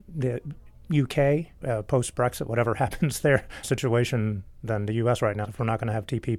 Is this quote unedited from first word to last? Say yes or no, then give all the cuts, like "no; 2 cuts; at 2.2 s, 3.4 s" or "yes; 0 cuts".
no; 3 cuts; at 1.6 s, 3.6 s, 5.4 s